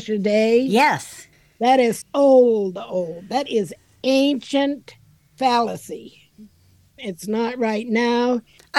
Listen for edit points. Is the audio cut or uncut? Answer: cut